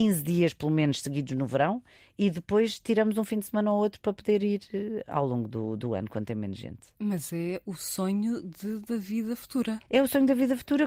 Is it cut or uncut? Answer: cut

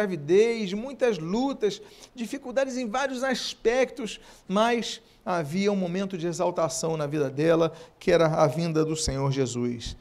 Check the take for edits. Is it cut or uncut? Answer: uncut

